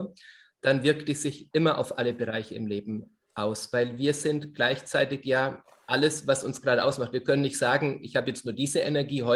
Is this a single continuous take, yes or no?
yes